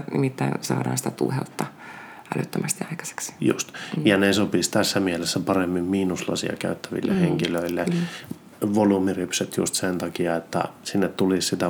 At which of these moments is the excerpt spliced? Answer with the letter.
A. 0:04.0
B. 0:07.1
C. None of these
C